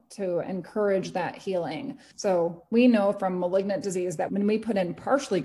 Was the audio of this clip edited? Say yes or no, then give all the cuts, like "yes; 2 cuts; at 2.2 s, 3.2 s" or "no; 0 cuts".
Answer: yes; 2 cuts; at 2.1 s, 4.3 s